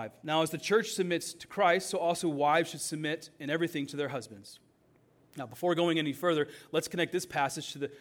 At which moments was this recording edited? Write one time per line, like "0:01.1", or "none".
none